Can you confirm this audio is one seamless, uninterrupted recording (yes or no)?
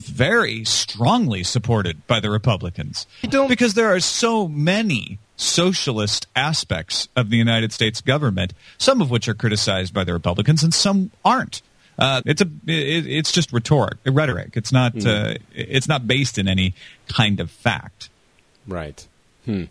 no